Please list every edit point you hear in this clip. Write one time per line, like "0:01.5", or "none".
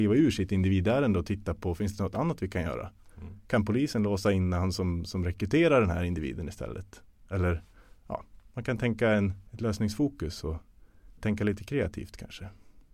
0:09.5
0:11.2